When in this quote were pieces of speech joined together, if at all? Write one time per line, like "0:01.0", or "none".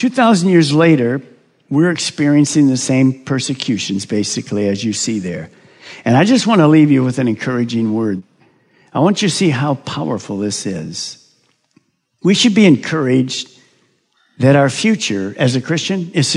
none